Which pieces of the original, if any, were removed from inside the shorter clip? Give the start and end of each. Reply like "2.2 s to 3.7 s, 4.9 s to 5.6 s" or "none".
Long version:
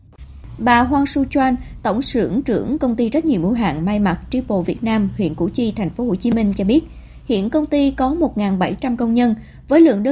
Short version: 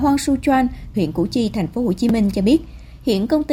1.8 s to 5.2 s